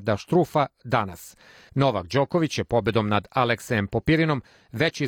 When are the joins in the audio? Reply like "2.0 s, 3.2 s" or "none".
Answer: 1.7 s